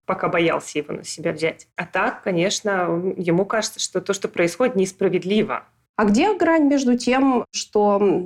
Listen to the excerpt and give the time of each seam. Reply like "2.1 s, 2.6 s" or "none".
1.7 s